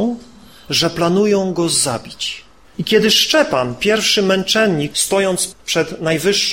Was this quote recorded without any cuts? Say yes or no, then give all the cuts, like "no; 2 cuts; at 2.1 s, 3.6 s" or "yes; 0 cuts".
no; 2 cuts; at 2.6 s, 4.9 s